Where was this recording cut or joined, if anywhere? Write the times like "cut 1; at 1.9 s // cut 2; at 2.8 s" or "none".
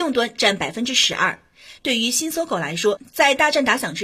cut 1; at 1.8 s

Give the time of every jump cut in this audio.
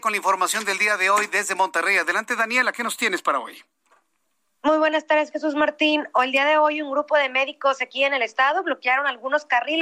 none

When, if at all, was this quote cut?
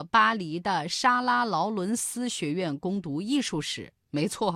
none

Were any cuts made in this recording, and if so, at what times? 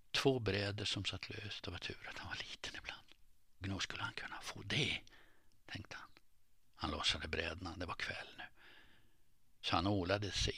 cut 1; at 3.6 s // cut 2; at 9.6 s

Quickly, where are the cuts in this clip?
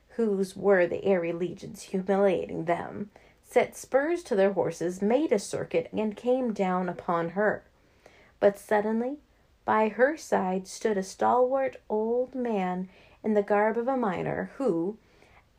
cut 1; at 5.9 s

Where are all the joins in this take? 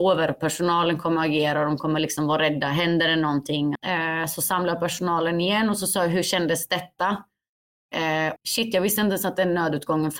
cut 1; at 3.8 s // cut 2; at 8.4 s

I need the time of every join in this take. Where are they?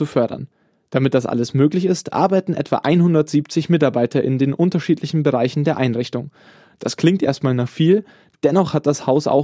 none

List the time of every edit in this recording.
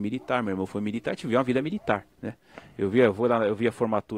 cut 1; at 2.1 s

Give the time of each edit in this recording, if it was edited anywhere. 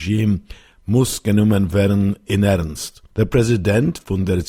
cut 1; at 3.1 s

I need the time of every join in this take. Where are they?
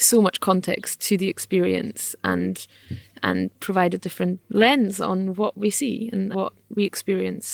cut 1; at 6.3 s

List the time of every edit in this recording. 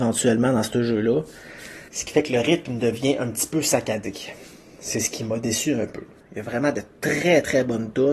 cut 1; at 1.9 s // cut 2; at 6.2 s

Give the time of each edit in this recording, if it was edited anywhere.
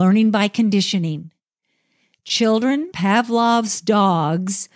cut 1; at 2.9 s

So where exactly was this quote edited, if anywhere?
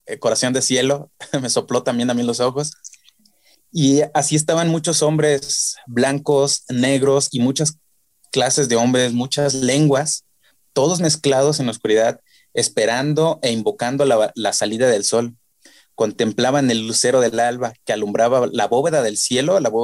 none

